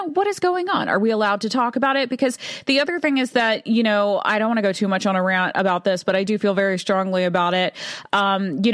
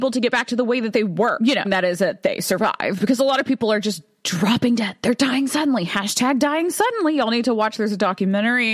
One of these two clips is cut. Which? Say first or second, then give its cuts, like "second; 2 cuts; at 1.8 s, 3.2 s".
second; 1 cut; at 1.6 s